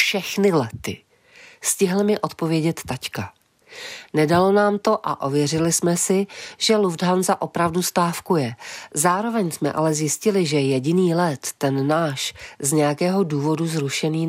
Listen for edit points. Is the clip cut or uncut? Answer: uncut